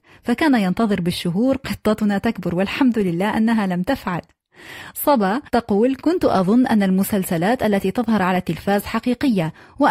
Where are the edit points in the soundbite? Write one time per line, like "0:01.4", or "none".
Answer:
0:05.5